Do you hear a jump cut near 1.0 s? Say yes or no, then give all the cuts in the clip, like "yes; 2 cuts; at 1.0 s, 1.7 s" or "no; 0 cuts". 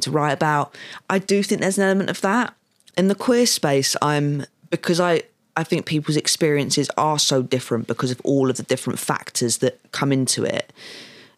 no; 1 cut; at 2.9 s